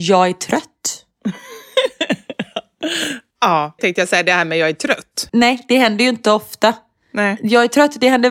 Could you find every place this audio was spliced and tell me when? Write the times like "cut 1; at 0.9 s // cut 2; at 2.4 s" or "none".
cut 1; at 3.8 s // cut 2; at 5.3 s